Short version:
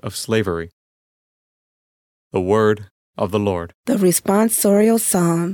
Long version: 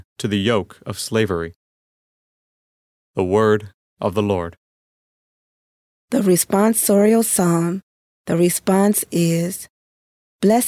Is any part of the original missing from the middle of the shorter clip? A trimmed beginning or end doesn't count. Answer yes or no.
yes